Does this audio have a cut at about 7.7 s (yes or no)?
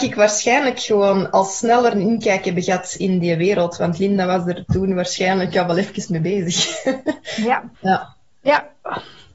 yes